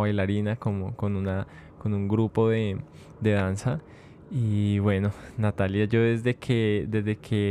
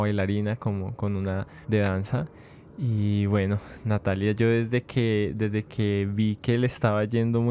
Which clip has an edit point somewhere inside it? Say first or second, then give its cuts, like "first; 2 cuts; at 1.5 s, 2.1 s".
second; 1 cut; at 1.6 s